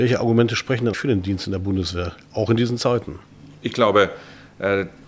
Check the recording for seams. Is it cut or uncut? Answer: cut